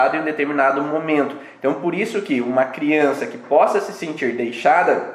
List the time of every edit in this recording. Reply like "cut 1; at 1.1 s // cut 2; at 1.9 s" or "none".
none